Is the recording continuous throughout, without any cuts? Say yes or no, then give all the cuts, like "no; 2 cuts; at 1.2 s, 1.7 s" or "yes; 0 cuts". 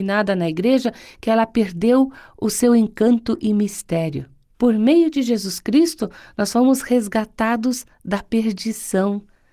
no; 1 cut; at 4.5 s